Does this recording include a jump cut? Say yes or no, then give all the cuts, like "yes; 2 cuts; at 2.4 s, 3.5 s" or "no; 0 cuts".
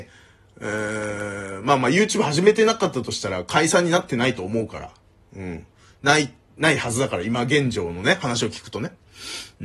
no; 0 cuts